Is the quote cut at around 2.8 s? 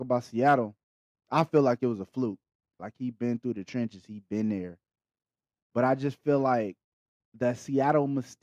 yes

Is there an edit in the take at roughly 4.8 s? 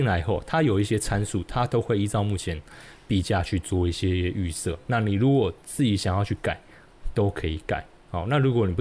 no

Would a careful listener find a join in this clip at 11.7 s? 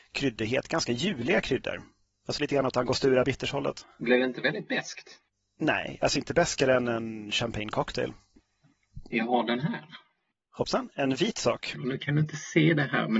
yes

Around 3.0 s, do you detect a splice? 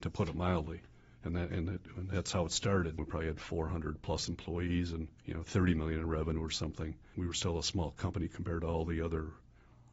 yes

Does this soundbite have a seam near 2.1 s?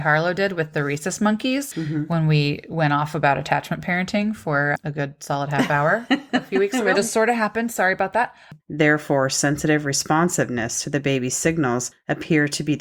no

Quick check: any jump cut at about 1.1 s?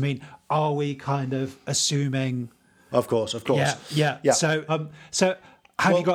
no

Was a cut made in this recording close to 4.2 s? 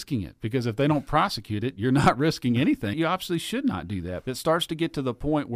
yes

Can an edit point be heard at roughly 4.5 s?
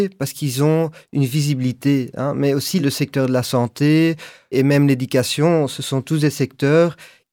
yes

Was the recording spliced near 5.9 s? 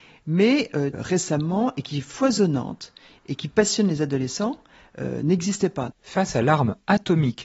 yes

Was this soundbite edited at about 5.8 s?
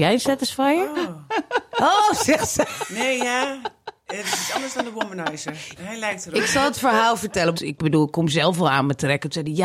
yes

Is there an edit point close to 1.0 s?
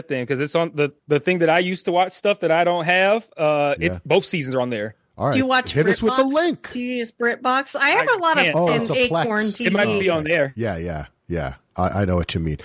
yes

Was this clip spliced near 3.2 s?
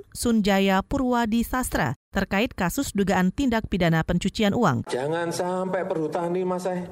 no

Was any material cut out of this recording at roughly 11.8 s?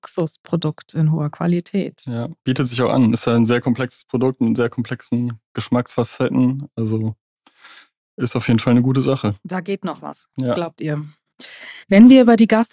yes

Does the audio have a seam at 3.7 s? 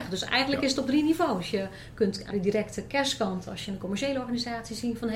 no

